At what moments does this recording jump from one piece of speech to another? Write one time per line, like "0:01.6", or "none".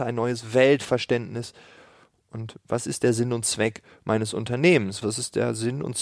0:05.0